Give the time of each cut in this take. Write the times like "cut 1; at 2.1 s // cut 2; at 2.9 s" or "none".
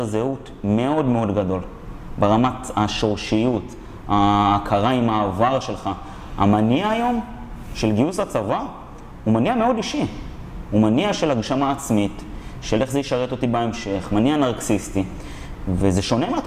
none

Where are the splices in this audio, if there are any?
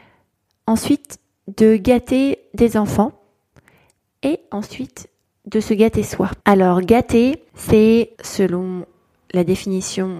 cut 1; at 6.4 s // cut 2; at 8.2 s

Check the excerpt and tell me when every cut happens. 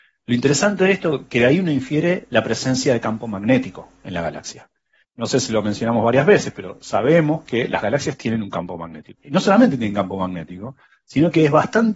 cut 1; at 5.0 s // cut 2; at 9.2 s

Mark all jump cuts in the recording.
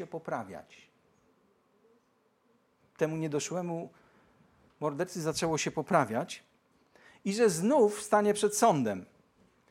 none

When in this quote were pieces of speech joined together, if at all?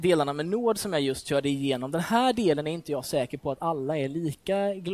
none

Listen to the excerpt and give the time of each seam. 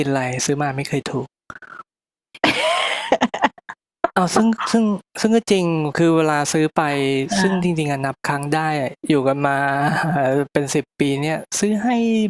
cut 1; at 9.0 s

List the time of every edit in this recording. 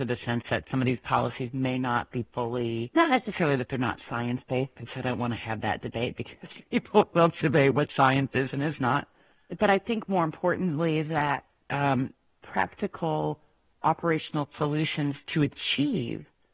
cut 1; at 12.3 s

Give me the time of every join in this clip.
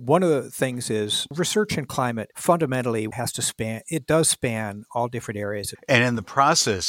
cut 1; at 3.1 s // cut 2; at 5.7 s

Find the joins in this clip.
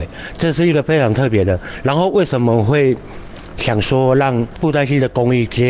none

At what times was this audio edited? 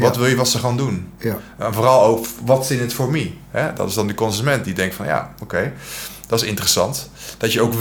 none

